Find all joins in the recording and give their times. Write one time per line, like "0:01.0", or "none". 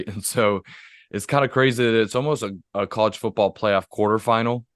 none